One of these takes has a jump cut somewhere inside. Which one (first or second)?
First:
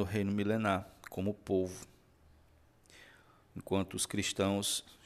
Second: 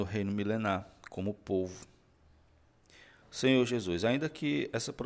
second